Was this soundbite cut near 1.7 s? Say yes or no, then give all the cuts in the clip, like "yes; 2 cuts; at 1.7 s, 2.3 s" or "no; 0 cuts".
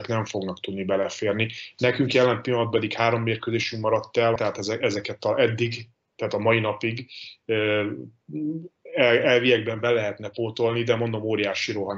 no; 1 cut; at 4.4 s